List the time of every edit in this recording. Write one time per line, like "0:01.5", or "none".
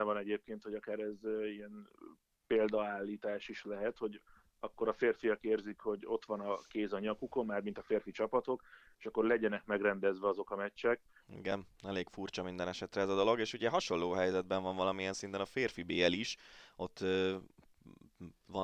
0:11.2

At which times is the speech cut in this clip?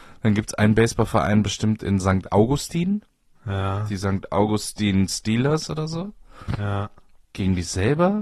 0:07.2

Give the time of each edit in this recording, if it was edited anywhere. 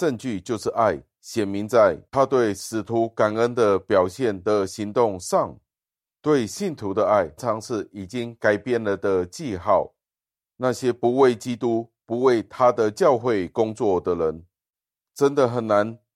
0:07.4

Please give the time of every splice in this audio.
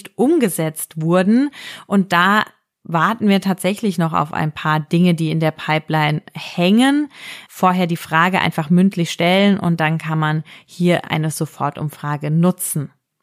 0:07.5

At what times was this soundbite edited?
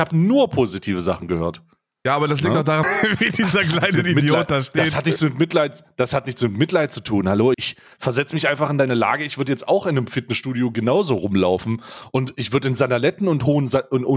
0:02.8
0:07.5

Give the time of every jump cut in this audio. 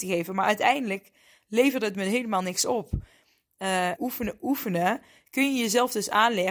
0:04.0

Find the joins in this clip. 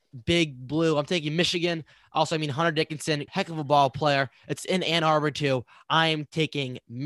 0:03.3

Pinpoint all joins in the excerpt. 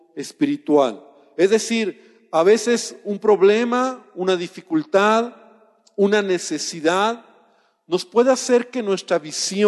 none

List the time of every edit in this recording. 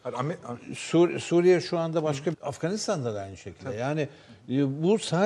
0:02.3

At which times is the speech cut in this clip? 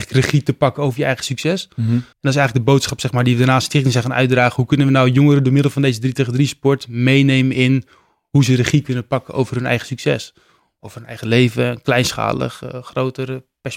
0:02.1

